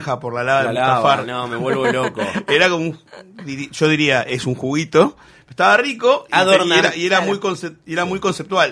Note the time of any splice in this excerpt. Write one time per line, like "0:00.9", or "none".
none